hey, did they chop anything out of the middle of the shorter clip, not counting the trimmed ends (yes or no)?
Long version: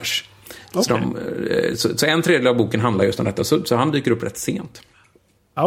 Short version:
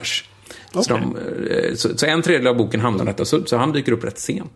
yes